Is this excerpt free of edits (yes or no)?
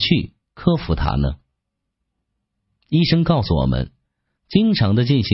yes